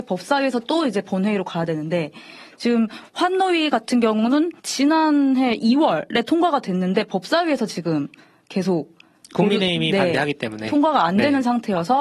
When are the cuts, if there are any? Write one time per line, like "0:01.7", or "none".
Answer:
0:04.6